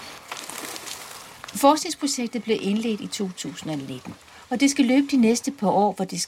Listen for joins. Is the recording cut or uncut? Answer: uncut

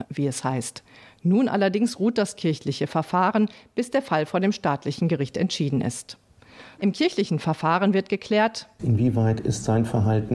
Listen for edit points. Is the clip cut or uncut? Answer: cut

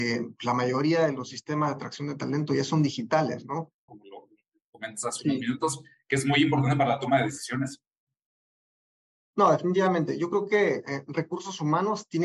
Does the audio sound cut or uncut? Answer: cut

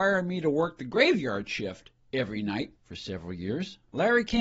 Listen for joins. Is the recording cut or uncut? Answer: cut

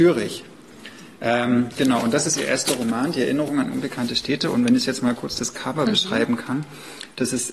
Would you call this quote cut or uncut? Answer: uncut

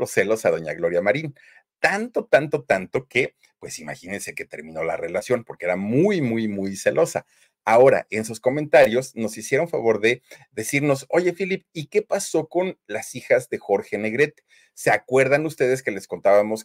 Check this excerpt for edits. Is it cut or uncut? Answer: uncut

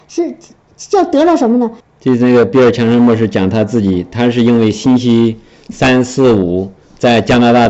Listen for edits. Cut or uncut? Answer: cut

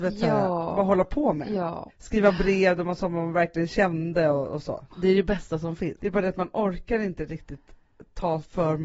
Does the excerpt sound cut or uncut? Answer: cut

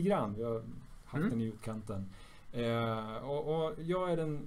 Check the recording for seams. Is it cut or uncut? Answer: uncut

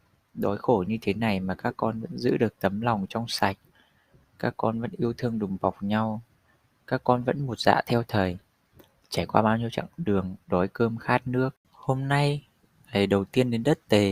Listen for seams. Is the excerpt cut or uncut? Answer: uncut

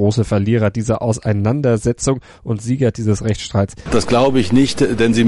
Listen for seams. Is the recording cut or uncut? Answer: cut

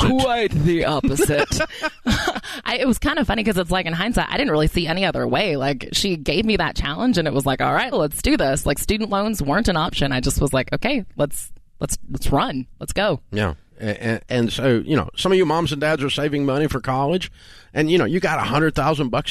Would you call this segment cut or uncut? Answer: cut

